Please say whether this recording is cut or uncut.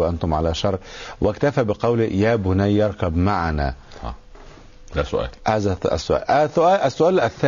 uncut